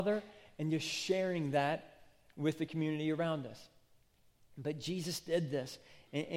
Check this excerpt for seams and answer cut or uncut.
uncut